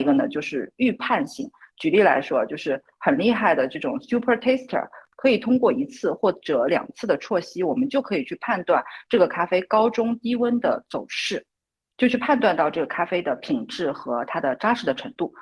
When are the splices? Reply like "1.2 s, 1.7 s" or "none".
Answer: none